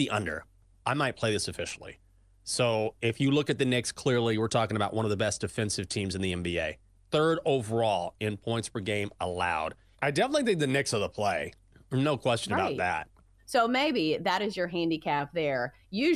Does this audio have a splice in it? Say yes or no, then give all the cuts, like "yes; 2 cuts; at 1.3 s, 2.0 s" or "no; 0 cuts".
yes; 2 cuts; at 9.9 s, 13.4 s